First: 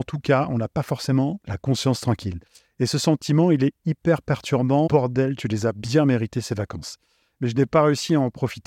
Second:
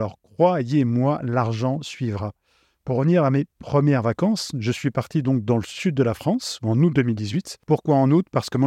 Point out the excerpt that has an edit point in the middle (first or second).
first